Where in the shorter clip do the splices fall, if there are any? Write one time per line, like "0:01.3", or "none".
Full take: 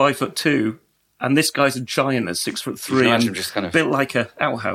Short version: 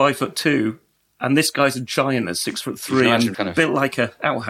0:03.3